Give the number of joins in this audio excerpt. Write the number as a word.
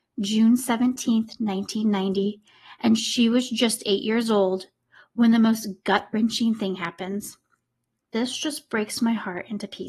zero